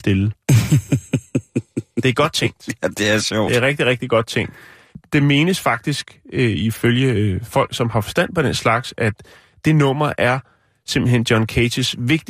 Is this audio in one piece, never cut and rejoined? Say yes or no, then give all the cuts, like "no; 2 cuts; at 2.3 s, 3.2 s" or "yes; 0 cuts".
yes; 0 cuts